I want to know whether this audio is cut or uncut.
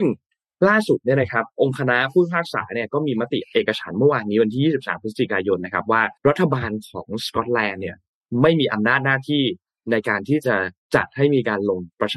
cut